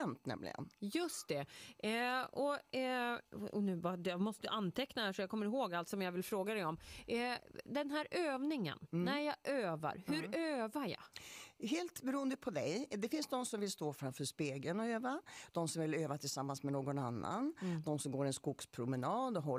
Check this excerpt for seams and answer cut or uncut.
uncut